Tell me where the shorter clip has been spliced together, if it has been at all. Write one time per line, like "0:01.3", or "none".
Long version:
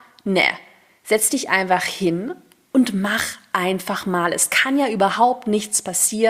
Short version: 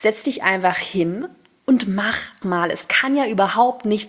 0:02.4